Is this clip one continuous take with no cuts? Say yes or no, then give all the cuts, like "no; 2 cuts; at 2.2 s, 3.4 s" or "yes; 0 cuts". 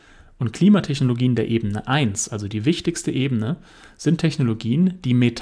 yes; 0 cuts